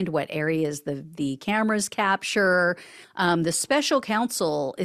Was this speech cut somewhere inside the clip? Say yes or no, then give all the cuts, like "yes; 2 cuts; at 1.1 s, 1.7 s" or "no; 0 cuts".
yes; 1 cut; at 3.0 s